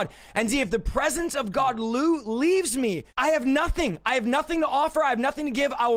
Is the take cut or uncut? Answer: cut